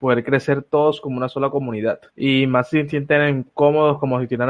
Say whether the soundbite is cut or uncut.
cut